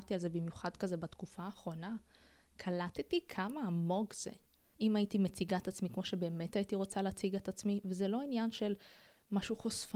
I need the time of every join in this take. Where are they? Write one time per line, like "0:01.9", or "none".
0:04.7